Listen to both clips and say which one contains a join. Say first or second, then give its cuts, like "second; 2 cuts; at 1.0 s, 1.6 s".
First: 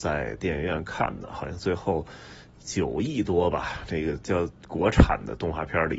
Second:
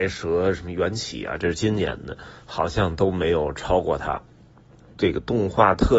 second; 1 cut; at 4.9 s